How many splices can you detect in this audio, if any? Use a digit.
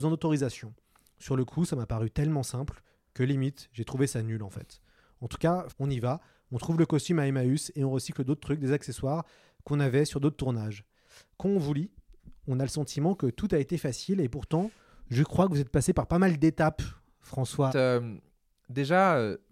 2